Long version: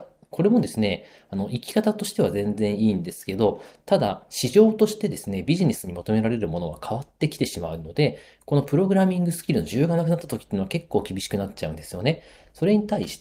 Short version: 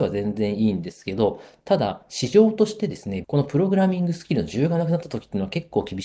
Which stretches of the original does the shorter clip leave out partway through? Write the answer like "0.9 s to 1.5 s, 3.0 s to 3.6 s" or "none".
5.5 s to 8.4 s